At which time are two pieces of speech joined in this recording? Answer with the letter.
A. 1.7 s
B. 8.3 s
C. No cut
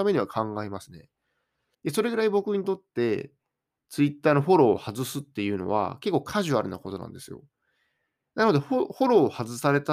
A